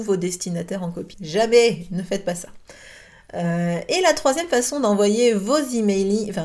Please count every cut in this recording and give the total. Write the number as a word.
one